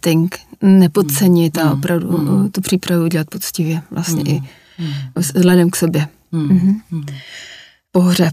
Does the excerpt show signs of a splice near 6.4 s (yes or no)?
no